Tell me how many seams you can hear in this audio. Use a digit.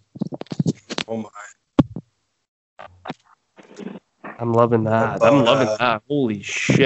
0